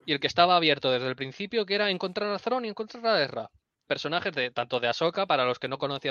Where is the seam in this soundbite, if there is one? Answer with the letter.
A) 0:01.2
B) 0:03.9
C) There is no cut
B